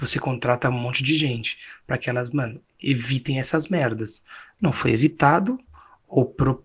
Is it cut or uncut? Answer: uncut